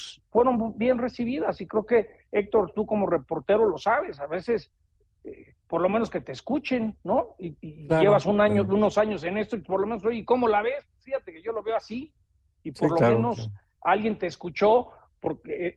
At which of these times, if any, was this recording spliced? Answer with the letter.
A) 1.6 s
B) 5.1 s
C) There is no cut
C